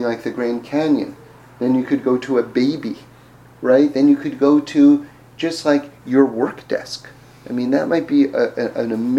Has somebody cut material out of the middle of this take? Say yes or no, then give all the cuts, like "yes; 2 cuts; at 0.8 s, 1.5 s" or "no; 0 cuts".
no; 0 cuts